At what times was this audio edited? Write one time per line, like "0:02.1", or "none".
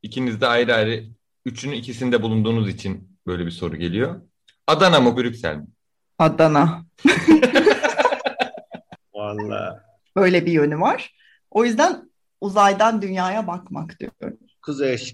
0:05.1
0:10.1